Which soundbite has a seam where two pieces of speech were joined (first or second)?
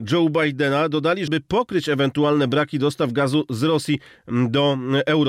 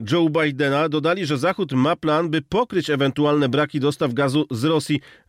first